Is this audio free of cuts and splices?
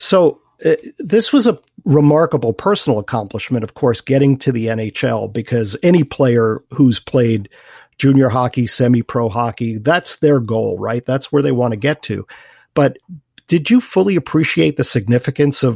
yes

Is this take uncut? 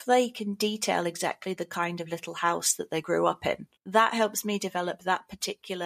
no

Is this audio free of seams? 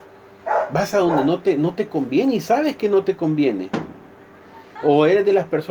no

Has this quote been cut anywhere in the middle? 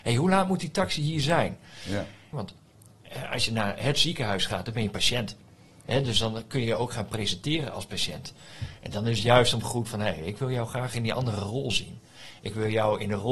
yes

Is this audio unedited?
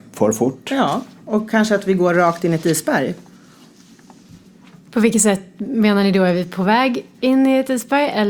yes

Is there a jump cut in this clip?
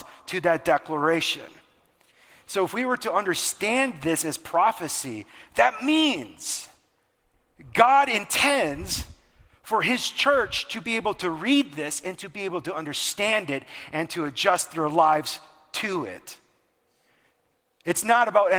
no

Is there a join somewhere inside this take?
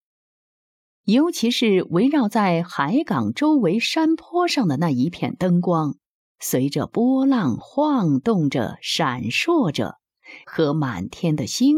yes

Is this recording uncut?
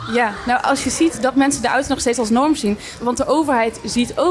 no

